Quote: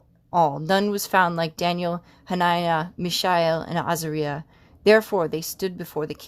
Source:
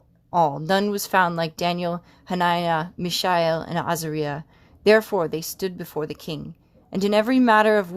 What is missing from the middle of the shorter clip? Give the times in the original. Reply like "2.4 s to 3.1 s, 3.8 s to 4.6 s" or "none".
none